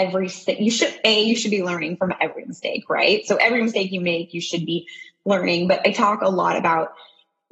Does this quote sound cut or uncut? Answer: uncut